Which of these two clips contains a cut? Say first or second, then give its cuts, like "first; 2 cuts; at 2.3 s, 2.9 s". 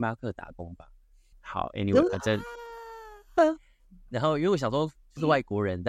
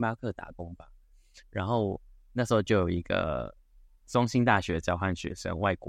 first; 1 cut; at 1.3 s